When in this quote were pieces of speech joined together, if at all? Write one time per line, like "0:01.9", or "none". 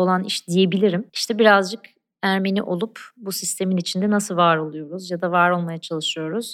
0:01.1

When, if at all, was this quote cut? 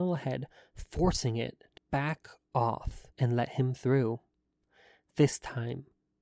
0:01.8
0:03.1

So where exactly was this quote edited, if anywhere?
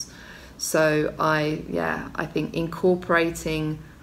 none

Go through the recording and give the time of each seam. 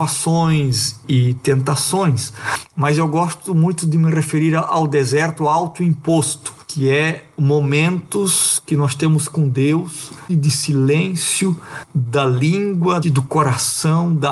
0:10.3
0:13.0

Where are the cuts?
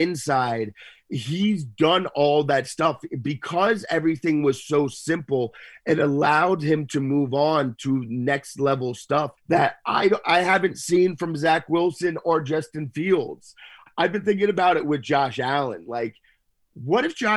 0:09.4
0:13.9

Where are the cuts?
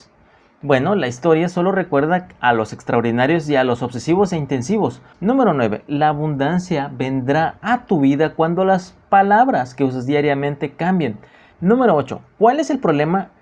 0:05.1
0:11.5

